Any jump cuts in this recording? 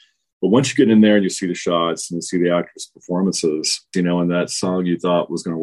yes; 1 cut; at 3.9 s

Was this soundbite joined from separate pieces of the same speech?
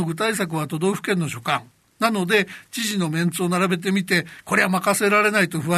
no; 0 cuts

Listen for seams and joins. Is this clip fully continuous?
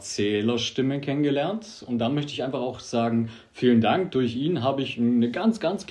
yes; 0 cuts

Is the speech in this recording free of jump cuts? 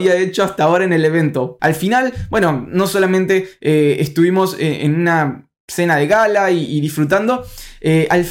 no; 1 cut; at 1.6 s

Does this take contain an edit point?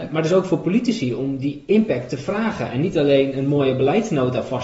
no; 0 cuts

